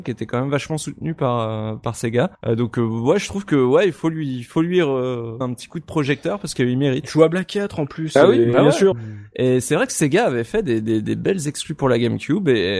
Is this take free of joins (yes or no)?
no